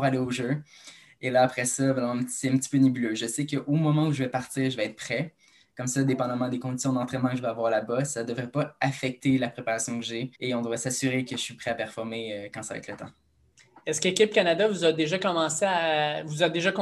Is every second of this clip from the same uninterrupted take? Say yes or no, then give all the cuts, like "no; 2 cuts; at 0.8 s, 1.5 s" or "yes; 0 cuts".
no; 1 cut; at 10.3 s